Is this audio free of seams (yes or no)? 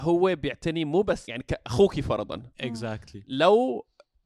no